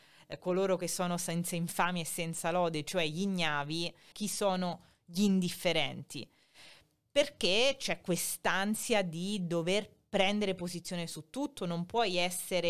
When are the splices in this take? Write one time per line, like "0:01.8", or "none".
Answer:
0:04.1
0:11.6